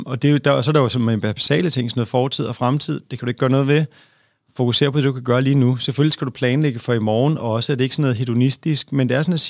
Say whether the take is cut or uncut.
uncut